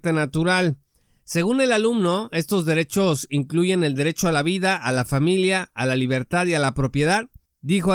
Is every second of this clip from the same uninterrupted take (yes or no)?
yes